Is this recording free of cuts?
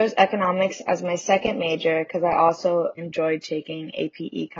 no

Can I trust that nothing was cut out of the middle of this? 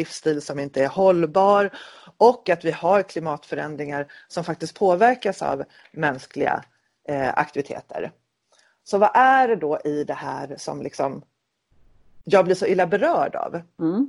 yes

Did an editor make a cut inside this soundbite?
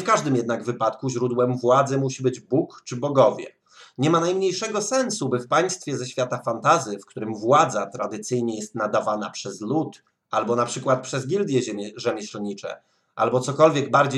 no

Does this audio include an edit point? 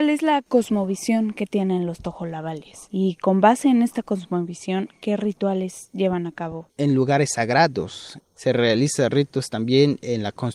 yes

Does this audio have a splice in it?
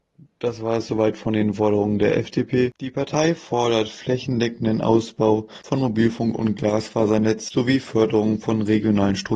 yes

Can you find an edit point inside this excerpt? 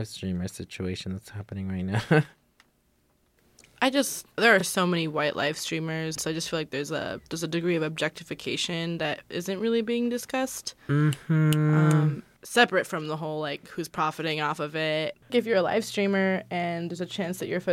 no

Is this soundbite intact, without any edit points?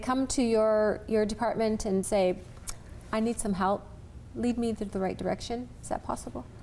no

